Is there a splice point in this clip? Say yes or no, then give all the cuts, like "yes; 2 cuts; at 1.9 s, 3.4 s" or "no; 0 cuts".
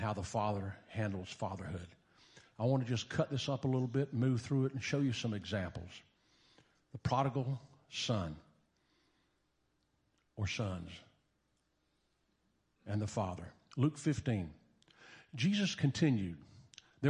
no; 0 cuts